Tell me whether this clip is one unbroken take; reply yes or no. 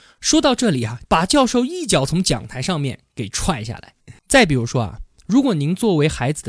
no